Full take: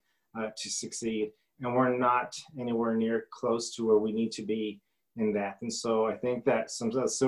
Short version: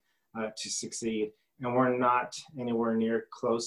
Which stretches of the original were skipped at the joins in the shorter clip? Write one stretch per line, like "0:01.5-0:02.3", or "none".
none